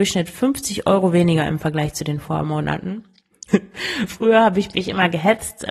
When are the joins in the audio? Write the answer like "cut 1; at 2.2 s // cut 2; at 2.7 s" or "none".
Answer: cut 1; at 3.5 s